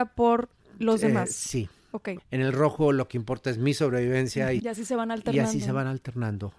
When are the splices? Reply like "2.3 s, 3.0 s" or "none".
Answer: 2.2 s, 4.6 s